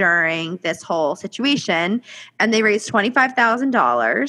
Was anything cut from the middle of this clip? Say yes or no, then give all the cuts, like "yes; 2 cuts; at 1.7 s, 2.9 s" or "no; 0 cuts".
no; 0 cuts